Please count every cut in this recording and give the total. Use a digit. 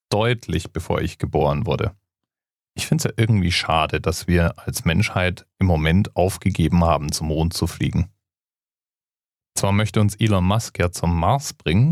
0